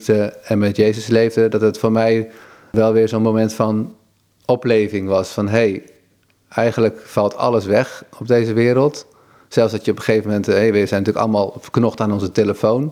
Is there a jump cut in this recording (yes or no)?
no